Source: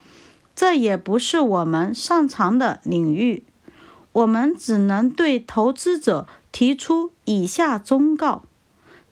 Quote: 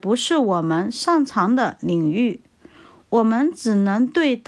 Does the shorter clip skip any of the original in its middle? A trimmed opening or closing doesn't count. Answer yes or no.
no